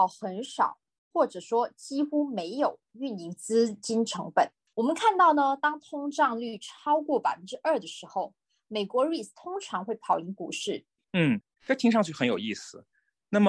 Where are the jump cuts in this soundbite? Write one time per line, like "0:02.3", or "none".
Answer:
0:04.7
0:11.0